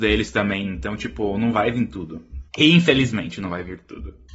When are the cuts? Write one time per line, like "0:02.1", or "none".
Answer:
0:02.5

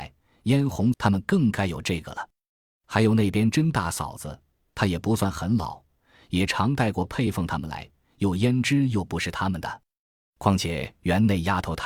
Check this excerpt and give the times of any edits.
0:00.9

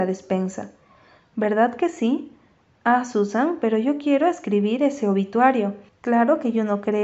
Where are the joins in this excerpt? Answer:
0:05.9

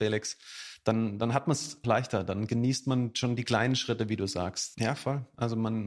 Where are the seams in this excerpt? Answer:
0:01.8
0:04.7

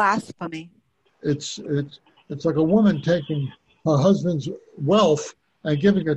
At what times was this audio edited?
0:01.1

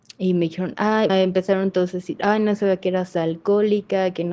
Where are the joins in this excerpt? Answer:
0:01.1

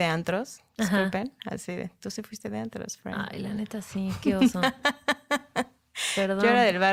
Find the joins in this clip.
none

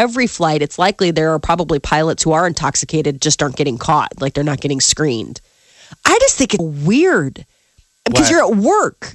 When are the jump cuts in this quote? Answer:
0:06.6

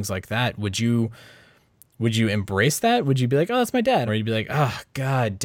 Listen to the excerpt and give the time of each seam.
0:04.1

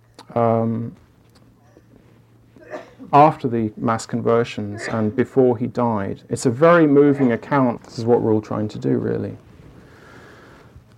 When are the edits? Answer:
0:07.8

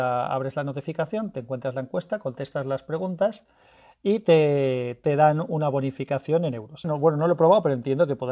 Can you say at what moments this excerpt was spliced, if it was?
0:06.8

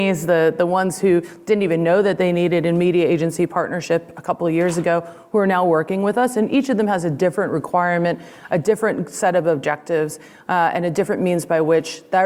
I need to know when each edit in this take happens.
none

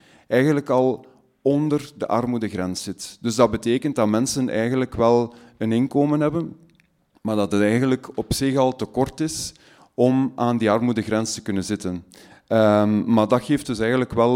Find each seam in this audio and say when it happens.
0:12.3

